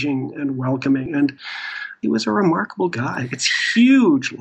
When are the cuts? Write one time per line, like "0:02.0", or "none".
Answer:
none